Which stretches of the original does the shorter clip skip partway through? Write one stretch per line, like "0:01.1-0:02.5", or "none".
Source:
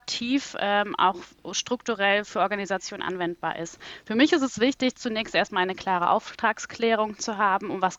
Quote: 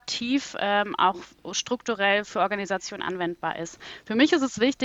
none